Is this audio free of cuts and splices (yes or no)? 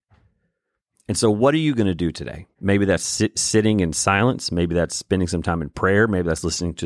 no